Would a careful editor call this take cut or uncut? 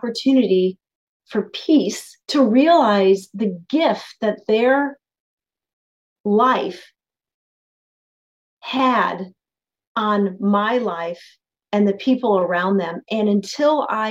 cut